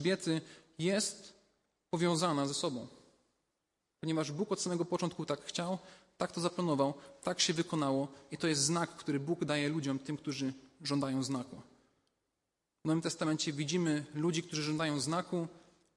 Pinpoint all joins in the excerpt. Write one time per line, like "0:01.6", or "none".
none